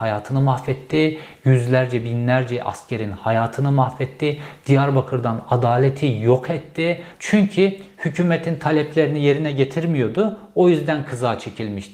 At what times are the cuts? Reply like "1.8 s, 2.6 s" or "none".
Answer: 4.6 s, 7.1 s